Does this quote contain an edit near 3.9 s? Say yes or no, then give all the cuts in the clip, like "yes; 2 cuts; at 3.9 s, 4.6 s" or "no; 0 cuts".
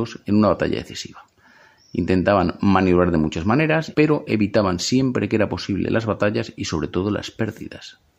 yes; 1 cut; at 3.9 s